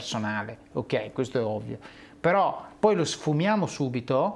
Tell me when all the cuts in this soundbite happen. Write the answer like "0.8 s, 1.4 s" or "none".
none